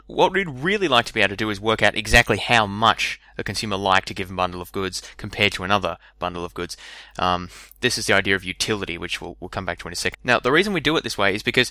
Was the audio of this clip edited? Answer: yes; 1 cut; at 10.1 s

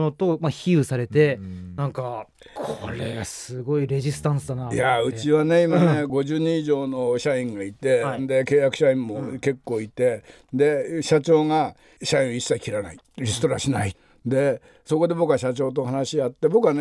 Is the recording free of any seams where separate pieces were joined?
no; 1 cut; at 2.4 s

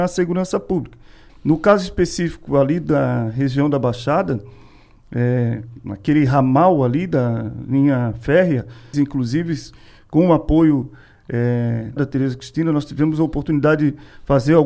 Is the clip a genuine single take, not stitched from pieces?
no; 3 cuts; at 1.3 s, 8.9 s, 12.0 s

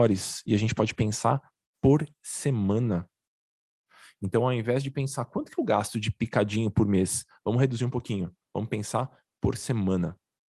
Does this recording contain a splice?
no; 0 cuts

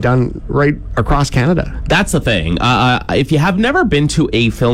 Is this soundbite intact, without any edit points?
yes; 0 cuts

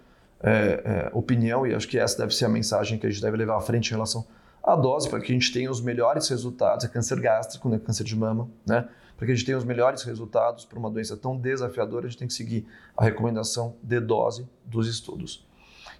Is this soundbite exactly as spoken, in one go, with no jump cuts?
yes; 0 cuts

